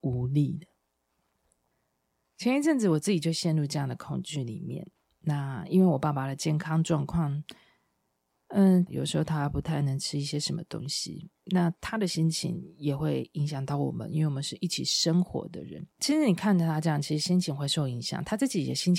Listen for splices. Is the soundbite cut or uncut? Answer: cut